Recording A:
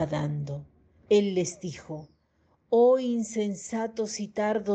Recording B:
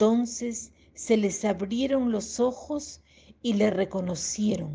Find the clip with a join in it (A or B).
A